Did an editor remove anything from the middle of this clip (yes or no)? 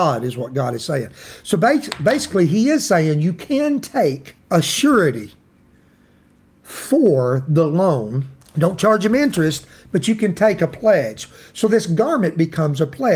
yes